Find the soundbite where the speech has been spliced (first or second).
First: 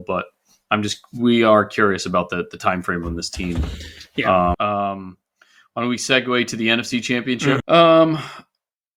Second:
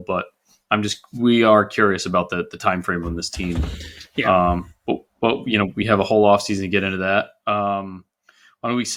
first